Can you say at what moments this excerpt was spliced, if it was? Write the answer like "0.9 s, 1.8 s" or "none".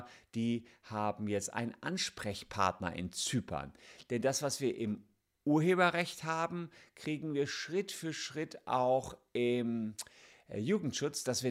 none